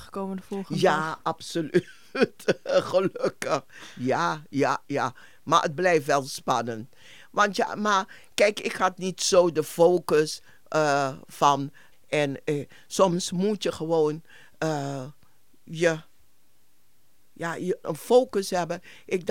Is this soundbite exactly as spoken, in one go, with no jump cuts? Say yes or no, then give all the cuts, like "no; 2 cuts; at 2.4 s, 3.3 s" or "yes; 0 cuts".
no; 2 cuts; at 11.9 s, 17.8 s